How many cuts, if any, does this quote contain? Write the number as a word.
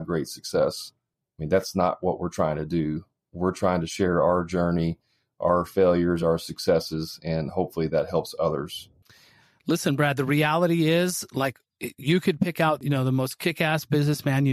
zero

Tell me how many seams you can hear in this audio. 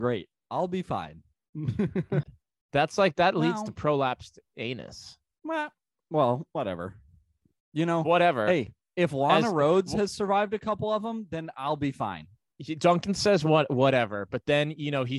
one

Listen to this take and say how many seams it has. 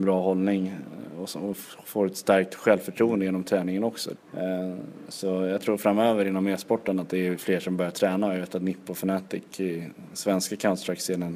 one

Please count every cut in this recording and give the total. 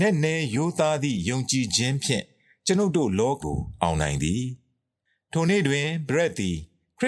one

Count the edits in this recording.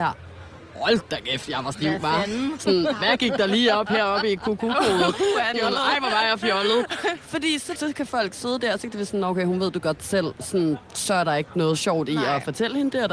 two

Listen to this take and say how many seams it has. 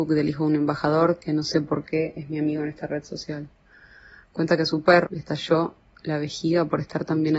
one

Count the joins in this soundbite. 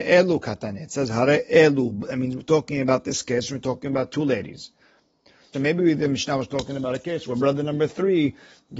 one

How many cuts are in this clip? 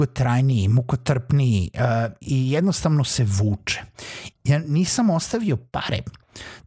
two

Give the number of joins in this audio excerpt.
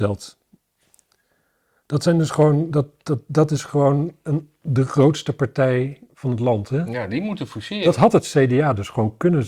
zero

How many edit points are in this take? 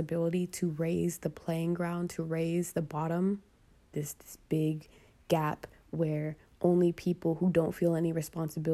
one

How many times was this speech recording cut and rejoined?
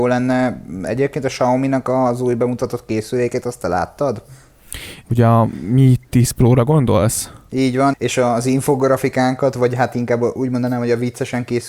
two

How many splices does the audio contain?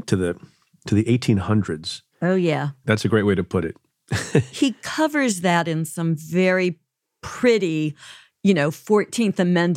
one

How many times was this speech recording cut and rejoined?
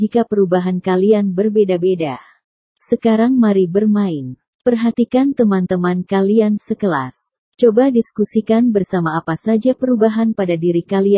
two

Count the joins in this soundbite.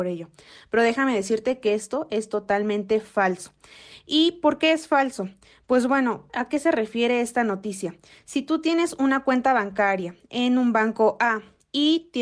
one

